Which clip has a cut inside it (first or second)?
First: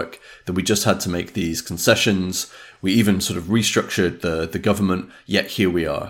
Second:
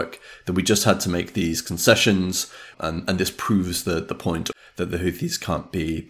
second